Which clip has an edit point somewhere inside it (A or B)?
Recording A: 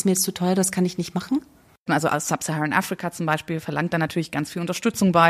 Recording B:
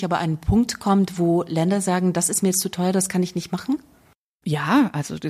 A